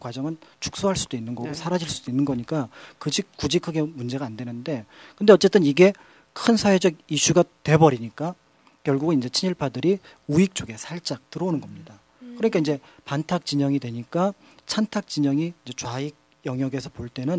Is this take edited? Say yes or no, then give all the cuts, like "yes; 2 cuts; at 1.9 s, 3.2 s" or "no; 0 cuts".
no; 0 cuts